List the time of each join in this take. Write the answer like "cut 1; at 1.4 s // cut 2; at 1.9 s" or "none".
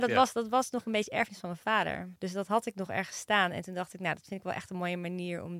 cut 1; at 2.2 s